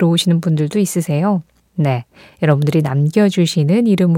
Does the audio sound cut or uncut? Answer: uncut